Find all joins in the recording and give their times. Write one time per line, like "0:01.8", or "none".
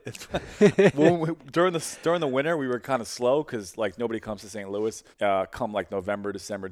0:05.1